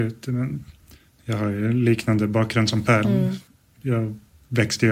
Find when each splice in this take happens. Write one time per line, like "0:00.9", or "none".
0:03.0